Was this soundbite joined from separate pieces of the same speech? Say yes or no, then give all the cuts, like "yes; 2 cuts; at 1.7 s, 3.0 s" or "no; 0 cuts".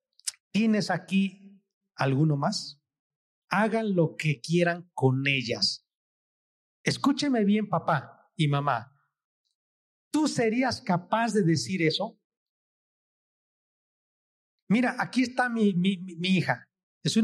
yes; 1 cut; at 3.3 s